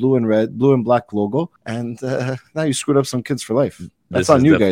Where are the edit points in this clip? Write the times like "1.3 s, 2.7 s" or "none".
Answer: 1.6 s